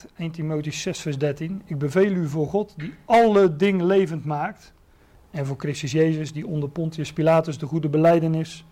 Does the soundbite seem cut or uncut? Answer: uncut